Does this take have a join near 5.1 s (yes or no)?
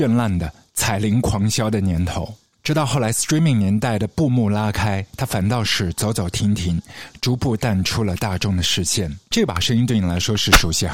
no